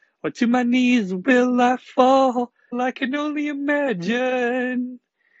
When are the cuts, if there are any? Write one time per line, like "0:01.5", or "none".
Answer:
0:02.7